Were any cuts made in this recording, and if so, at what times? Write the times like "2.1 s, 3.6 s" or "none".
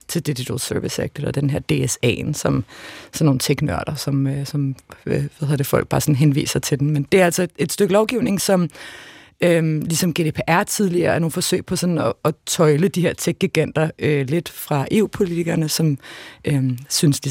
none